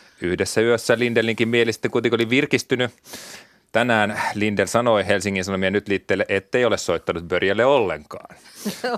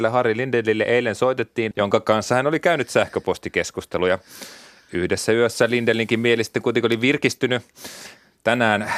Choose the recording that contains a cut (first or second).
second